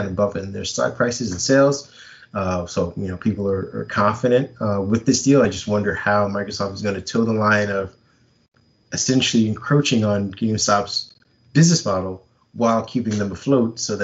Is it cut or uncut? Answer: uncut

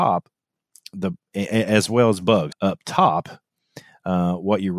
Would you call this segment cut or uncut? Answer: cut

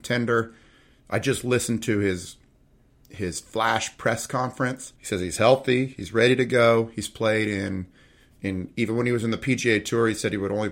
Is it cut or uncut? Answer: cut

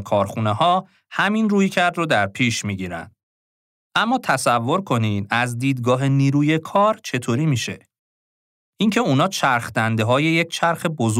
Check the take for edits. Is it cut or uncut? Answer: uncut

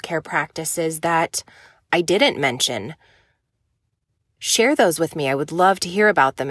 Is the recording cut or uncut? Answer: uncut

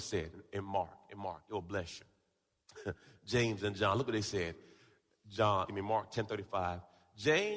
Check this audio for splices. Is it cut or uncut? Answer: cut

